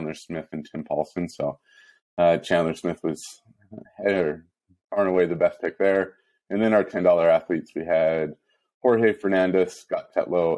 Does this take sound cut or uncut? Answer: uncut